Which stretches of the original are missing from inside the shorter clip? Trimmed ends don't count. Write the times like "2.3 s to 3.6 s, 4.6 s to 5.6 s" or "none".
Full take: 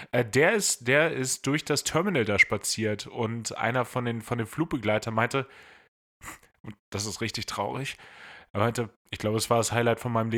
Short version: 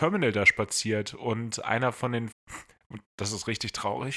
4.2 s to 6.0 s